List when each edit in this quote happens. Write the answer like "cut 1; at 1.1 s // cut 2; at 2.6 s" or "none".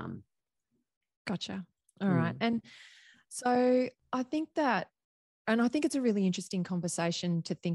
none